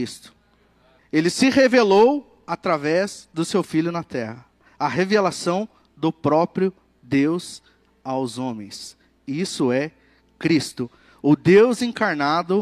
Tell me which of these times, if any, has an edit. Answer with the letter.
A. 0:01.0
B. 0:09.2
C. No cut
A